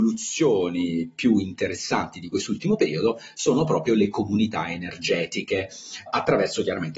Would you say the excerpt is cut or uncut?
uncut